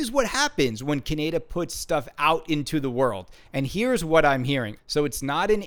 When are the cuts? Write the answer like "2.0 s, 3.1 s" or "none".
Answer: 3.4 s, 4.8 s